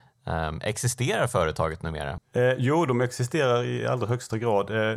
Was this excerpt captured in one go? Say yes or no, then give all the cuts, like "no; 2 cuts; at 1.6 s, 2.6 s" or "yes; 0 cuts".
no; 1 cut; at 2.2 s